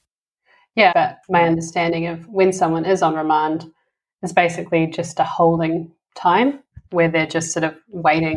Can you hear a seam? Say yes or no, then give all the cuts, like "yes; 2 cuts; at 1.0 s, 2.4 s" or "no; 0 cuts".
yes; 1 cut; at 0.9 s